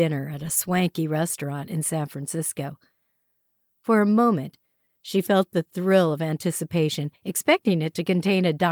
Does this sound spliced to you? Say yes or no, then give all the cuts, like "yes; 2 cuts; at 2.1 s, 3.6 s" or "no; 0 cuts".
no; 0 cuts